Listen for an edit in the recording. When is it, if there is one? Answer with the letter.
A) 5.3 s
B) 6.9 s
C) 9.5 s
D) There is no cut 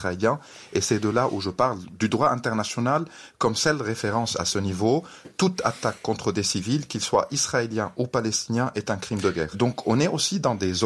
C